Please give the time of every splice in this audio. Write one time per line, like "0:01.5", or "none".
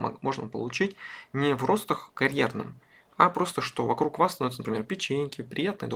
none